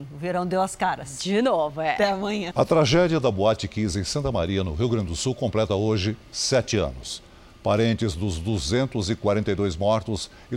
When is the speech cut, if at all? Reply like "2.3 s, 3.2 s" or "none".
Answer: 2.5 s

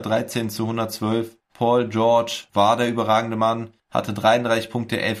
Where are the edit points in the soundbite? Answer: none

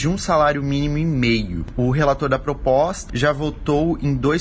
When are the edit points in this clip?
3.1 s

